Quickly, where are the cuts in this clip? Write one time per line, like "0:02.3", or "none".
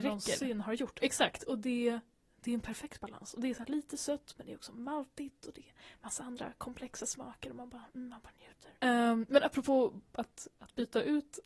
0:08.8